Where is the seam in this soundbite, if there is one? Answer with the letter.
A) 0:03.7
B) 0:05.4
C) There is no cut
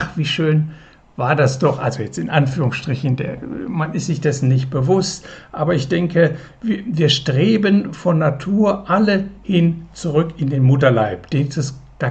C